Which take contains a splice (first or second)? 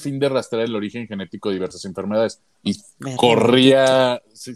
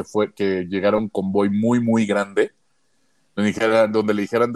first